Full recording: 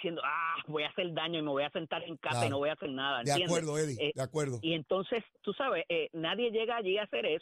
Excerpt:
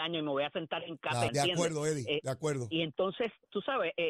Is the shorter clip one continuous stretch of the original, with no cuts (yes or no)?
no